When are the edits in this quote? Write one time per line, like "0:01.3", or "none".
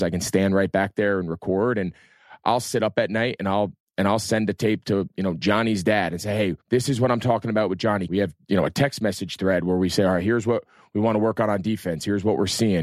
0:06.6
0:08.1